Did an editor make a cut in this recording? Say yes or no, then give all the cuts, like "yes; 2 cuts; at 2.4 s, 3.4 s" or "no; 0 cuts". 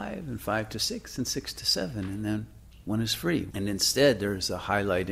yes; 1 cut; at 3.5 s